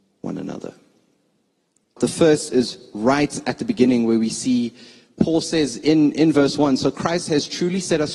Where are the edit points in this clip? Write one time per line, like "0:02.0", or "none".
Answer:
0:02.0